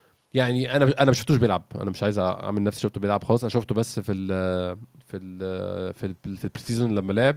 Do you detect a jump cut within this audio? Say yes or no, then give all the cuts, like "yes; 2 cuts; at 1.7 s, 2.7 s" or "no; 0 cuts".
no; 0 cuts